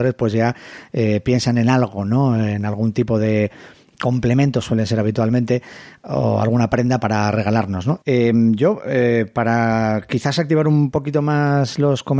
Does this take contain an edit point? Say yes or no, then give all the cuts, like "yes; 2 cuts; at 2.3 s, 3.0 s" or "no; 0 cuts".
yes; 1 cut; at 8.0 s